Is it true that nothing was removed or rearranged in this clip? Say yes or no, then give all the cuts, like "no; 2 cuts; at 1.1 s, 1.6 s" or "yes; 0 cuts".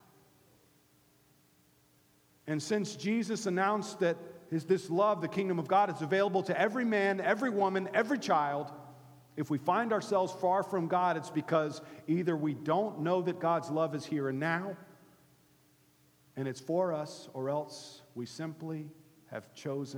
yes; 0 cuts